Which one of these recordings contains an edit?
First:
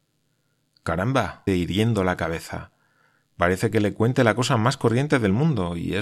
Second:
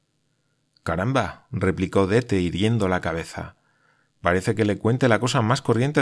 first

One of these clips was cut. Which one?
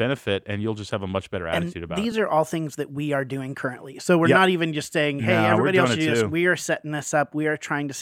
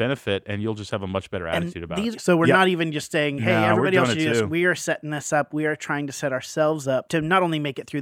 second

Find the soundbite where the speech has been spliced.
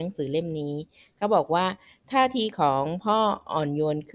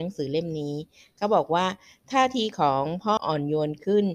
second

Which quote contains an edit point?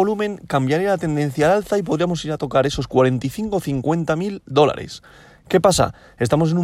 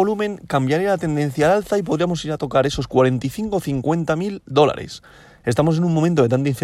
second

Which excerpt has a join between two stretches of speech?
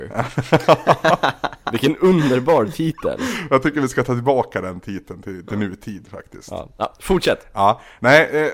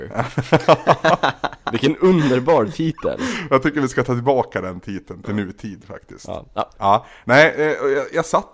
second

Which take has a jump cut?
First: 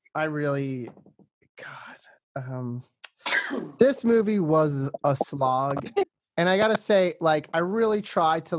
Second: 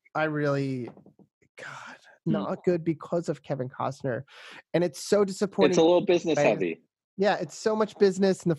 second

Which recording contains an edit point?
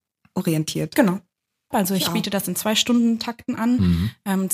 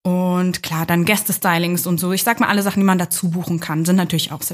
first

